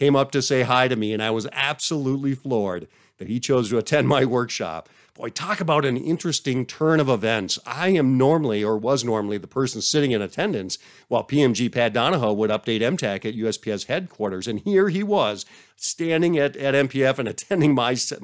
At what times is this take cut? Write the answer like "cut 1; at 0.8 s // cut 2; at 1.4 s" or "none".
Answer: none